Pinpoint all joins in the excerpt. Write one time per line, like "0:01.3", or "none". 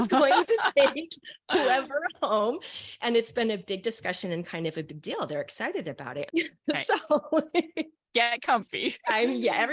0:06.3